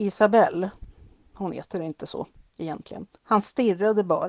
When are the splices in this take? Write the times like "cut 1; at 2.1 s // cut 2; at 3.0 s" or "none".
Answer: cut 1; at 1.3 s // cut 2; at 3.2 s